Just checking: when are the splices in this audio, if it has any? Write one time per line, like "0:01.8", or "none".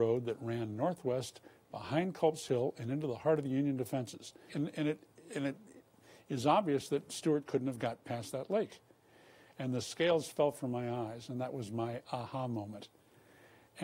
0:04.5
0:09.5